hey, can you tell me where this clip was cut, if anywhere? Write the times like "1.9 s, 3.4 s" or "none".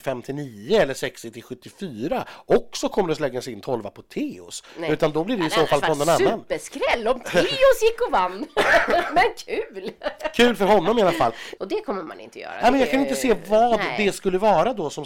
11.6 s